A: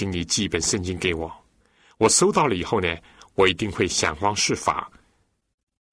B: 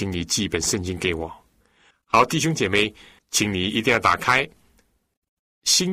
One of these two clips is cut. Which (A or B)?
B